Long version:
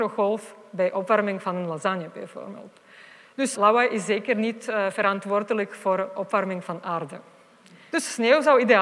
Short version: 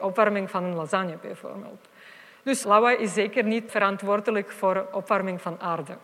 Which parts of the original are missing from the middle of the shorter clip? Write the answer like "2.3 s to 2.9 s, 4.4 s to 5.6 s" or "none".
4.6 s to 4.9 s